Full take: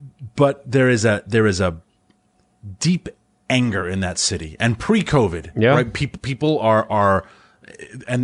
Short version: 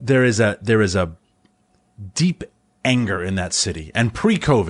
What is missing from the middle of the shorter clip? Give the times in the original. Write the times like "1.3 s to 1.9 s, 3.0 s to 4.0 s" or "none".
none